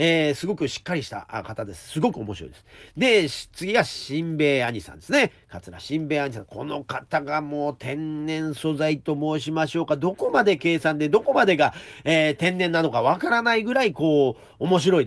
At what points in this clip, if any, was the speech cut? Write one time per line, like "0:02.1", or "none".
none